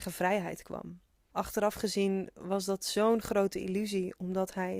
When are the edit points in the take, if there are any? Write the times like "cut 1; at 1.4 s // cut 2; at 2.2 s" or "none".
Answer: cut 1; at 1.3 s